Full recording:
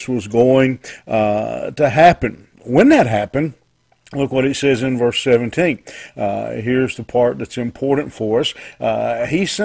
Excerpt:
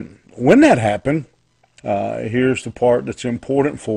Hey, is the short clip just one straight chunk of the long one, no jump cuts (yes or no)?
no